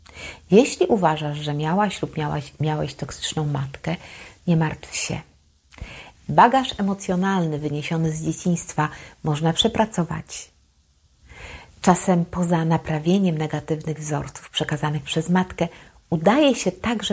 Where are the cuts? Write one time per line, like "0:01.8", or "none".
0:06.1